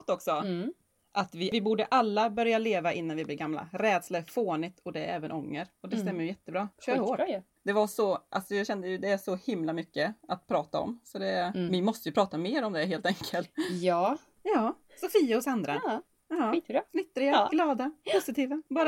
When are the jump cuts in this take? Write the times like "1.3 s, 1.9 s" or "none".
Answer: 7.5 s, 14.4 s